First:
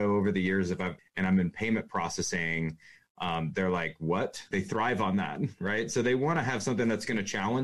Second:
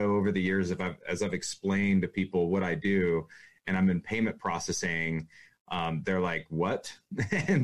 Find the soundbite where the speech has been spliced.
first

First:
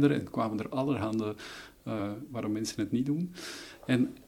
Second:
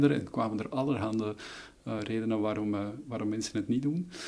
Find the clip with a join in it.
first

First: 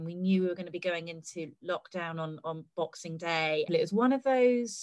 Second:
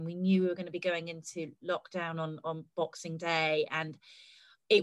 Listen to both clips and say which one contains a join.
first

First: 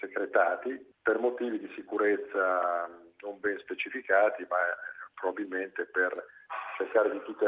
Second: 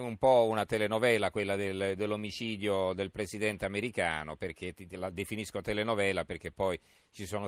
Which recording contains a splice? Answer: first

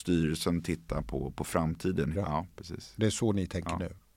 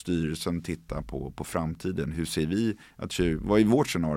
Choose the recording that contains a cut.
first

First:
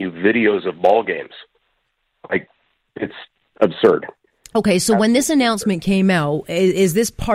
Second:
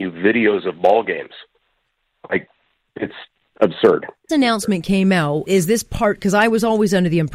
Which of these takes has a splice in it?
second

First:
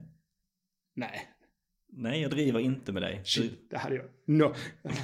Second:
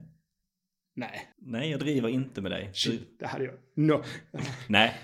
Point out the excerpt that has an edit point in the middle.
second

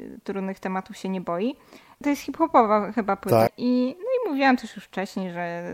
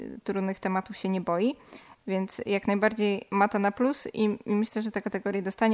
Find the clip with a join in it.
first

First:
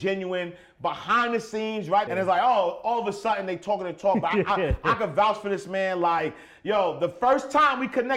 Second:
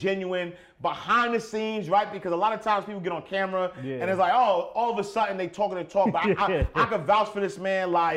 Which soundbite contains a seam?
first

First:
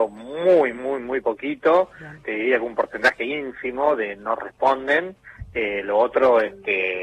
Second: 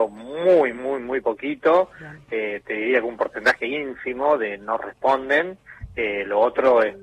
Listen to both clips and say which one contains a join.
first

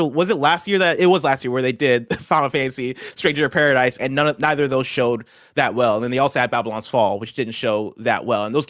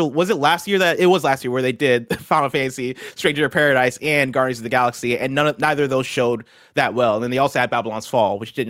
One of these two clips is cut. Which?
first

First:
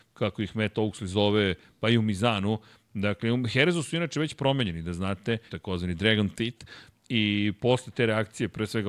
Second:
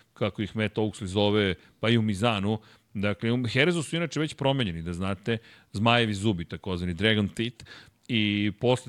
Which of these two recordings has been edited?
first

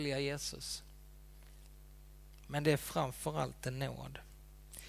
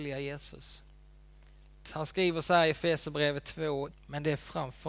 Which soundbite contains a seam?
second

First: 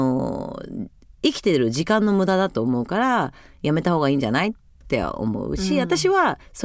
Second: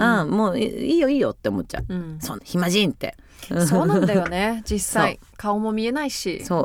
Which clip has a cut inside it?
second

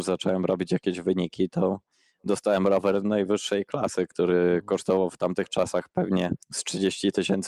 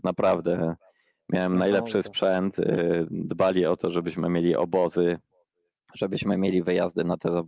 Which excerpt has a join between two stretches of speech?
first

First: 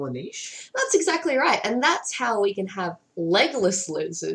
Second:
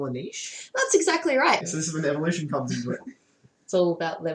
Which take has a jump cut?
second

